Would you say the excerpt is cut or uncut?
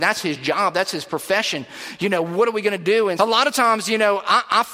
cut